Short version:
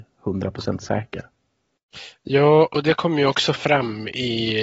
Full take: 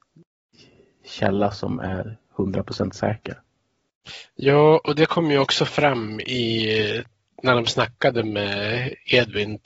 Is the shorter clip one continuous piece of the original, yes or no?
yes